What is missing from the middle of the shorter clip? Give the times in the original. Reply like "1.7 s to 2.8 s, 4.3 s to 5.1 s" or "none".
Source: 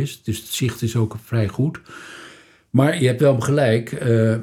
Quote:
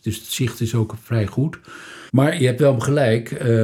2.3 s to 2.7 s